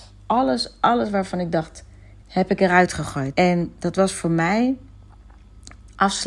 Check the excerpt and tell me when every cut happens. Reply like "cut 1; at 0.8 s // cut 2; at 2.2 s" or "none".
cut 1; at 2.2 s // cut 2; at 3.3 s